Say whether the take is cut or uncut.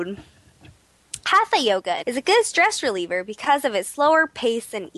cut